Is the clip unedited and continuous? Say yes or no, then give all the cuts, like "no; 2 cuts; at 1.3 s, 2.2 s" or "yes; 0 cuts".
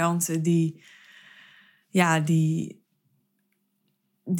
yes; 0 cuts